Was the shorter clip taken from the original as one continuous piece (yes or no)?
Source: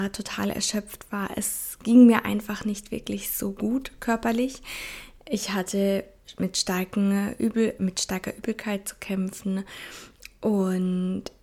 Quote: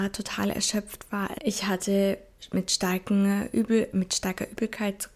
no